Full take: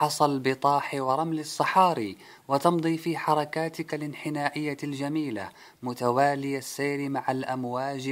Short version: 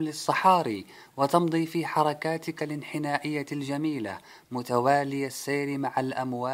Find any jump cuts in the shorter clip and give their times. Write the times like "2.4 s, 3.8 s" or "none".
none